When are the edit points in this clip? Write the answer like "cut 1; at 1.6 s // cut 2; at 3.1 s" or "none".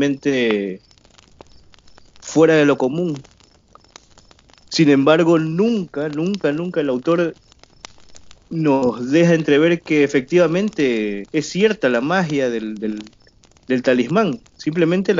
cut 1; at 11.3 s // cut 2; at 12.8 s